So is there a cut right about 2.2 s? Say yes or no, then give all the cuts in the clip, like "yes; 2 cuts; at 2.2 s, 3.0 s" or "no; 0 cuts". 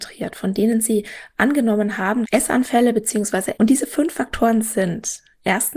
yes; 2 cuts; at 2.2 s, 3.5 s